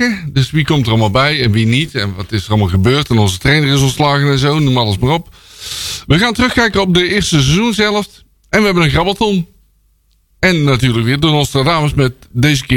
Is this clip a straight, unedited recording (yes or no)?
yes